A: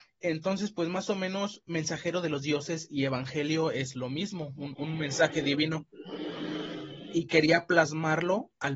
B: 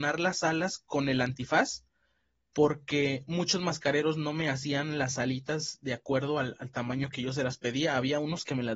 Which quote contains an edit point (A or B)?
A